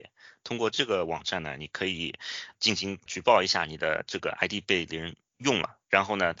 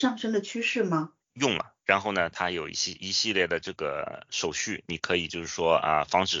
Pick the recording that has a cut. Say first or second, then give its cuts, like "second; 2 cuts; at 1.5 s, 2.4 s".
second; 1 cut; at 1.2 s